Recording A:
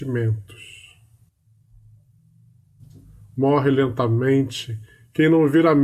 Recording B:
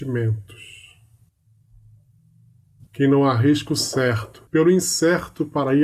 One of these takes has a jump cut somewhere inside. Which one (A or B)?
B